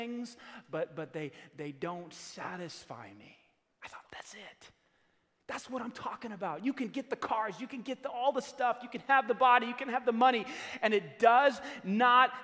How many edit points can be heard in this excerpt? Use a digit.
1